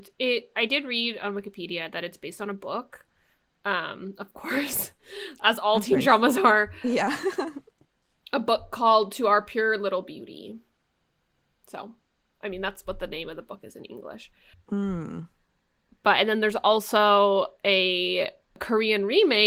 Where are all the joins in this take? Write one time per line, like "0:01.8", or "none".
none